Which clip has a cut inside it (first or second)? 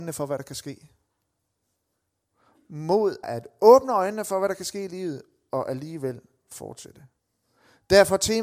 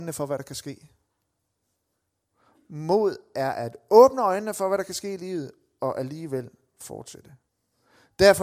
first